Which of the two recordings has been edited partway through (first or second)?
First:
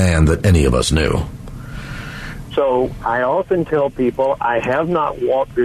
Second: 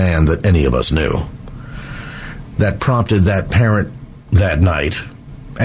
first